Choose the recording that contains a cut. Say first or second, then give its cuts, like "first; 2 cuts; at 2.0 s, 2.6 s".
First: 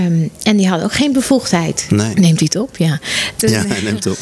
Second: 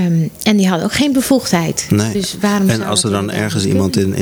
first; 1 cut; at 2.1 s